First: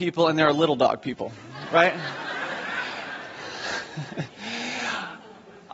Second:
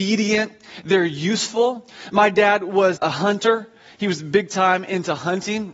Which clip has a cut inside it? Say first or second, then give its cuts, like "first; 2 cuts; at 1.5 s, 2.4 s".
second; 1 cut; at 3.0 s